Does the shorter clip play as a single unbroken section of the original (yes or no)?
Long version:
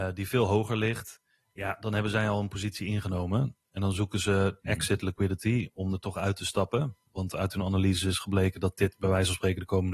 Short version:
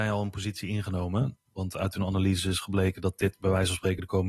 no